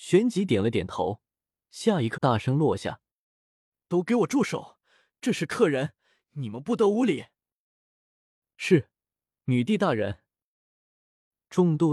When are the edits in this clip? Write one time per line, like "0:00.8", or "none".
0:02.1